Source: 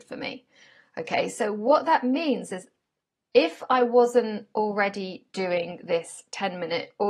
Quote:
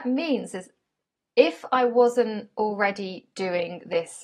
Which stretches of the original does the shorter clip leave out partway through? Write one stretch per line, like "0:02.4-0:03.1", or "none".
none